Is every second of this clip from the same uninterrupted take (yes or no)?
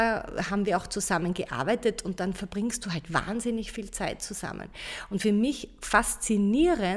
no